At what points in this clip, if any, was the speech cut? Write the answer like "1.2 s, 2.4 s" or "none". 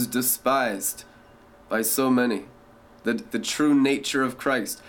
3.3 s